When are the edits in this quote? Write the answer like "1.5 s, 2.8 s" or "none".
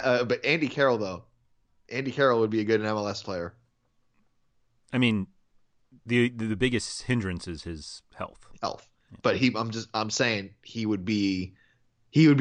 none